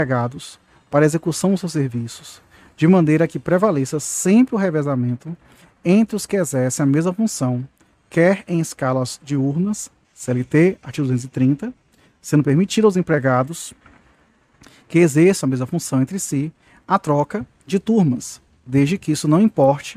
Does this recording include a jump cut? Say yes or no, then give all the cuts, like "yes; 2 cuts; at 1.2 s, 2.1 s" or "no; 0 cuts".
yes; 1 cut; at 10.0 s